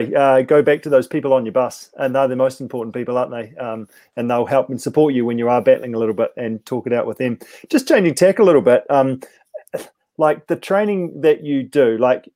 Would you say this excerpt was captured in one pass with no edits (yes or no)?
yes